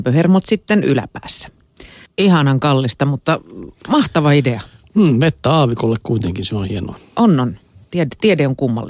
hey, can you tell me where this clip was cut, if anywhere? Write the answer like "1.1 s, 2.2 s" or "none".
2.1 s